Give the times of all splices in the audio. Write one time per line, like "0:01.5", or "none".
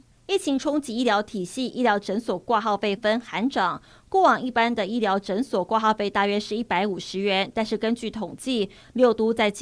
0:03.0